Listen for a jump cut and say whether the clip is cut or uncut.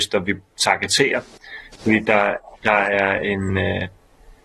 uncut